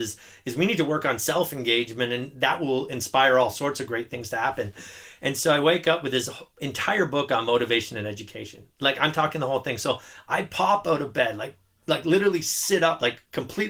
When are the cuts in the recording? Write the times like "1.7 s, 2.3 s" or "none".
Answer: none

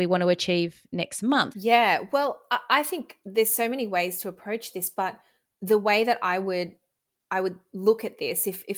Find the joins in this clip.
1.5 s

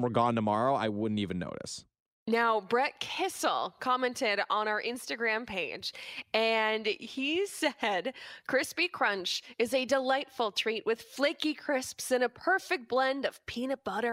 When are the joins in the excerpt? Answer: none

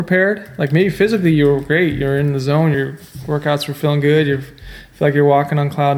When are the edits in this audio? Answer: none

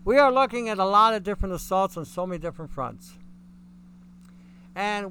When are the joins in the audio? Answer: none

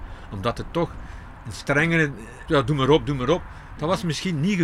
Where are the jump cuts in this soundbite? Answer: 2.5 s

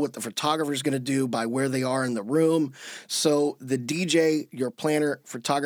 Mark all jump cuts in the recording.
none

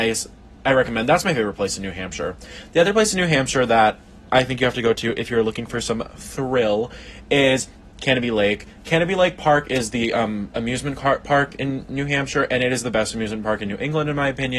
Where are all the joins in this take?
none

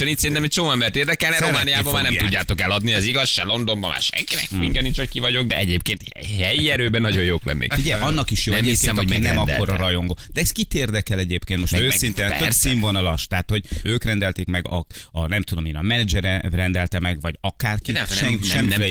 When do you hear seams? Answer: 13.8 s

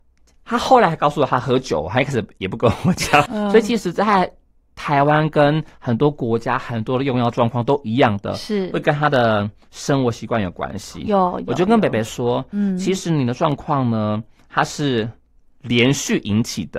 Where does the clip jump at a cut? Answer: 3.3 s

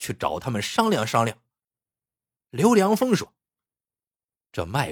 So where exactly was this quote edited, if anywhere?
2.4 s

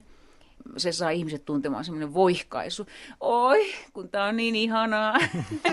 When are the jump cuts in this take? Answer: none

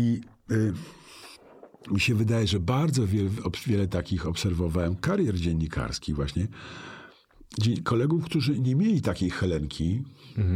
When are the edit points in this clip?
none

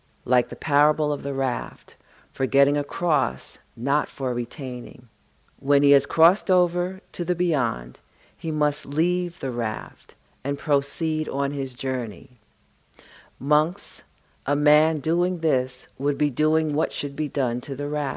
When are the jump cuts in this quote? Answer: 5.6 s

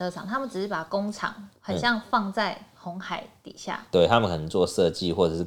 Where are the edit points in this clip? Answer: none

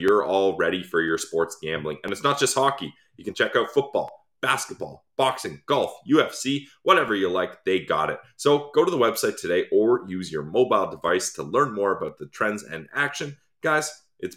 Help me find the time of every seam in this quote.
none

